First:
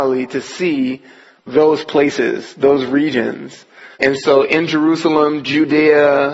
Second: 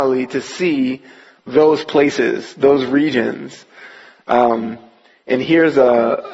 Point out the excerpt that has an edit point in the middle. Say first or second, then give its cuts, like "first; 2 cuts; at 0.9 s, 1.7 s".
first; 1 cut; at 3.9 s